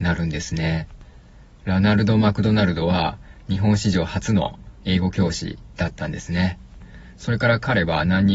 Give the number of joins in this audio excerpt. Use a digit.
0